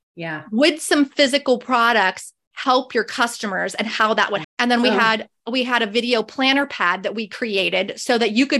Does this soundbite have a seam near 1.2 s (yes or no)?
no